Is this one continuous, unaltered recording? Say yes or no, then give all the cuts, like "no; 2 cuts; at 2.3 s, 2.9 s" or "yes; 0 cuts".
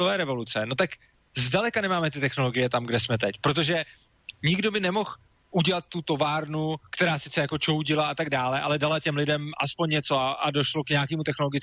yes; 0 cuts